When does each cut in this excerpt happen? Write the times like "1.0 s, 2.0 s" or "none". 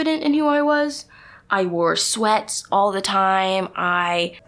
none